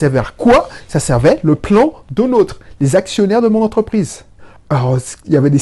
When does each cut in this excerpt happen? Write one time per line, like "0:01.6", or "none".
0:04.6